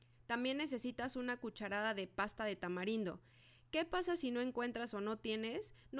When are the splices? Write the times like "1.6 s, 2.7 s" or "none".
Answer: none